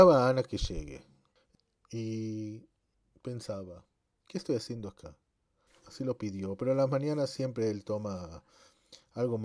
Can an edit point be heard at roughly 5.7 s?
yes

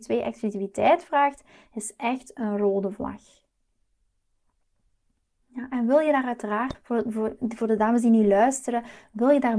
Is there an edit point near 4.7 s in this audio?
no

